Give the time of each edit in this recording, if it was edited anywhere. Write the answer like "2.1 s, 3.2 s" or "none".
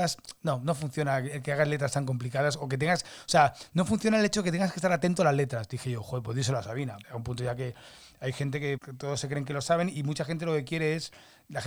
7.0 s, 8.8 s

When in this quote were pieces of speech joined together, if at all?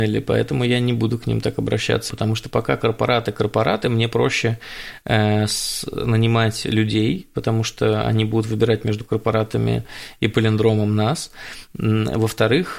2.1 s

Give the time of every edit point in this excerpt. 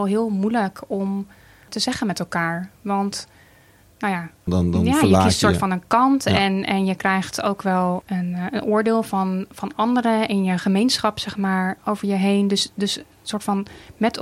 4.5 s

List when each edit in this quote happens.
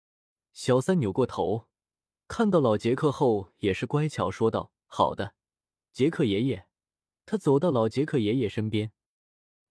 none

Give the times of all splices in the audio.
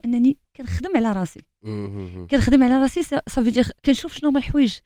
3.8 s

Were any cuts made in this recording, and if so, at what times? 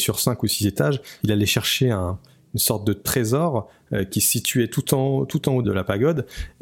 1.2 s, 5.6 s

